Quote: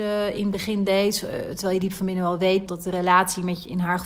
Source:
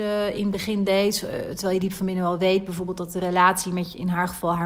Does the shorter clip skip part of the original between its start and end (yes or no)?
yes